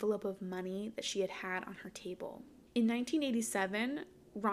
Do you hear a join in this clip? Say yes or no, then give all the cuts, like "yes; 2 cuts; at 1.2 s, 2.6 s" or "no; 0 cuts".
no; 0 cuts